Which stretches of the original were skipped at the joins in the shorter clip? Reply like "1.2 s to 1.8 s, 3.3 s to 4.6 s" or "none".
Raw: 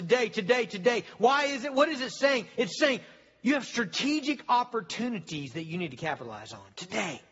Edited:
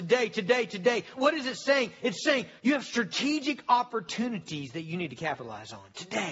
1.2 s to 1.7 s, 3.1 s to 3.4 s